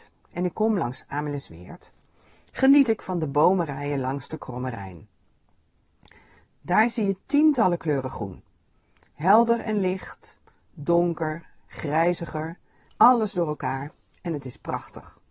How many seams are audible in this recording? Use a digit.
1